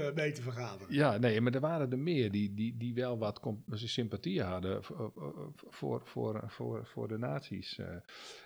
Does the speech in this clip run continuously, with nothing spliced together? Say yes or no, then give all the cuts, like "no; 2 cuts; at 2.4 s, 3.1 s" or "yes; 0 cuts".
yes; 0 cuts